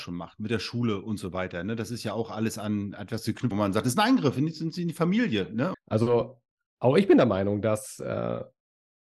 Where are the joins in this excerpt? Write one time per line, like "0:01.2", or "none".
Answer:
0:03.5
0:05.7